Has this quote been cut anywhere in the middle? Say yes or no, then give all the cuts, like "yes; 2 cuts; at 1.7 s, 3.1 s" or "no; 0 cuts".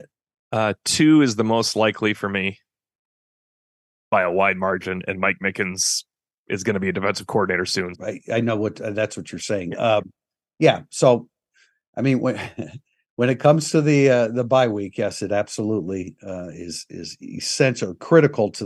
yes; 1 cut; at 7.9 s